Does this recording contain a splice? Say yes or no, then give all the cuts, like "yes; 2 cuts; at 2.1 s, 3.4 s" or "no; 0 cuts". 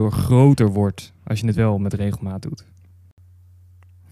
no; 0 cuts